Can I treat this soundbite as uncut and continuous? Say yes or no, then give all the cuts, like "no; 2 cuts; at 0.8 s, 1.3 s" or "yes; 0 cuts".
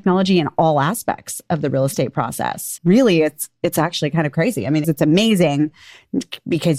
no; 2 cuts; at 2.8 s, 4.8 s